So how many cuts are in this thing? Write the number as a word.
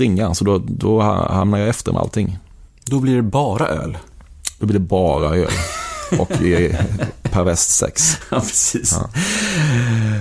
zero